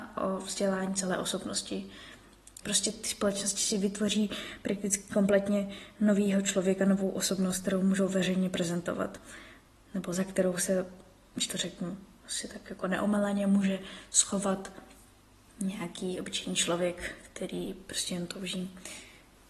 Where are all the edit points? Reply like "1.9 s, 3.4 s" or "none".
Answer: 2.6 s